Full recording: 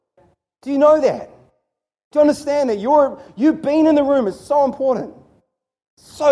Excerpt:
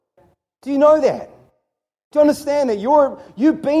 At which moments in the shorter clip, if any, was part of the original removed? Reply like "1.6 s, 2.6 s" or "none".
none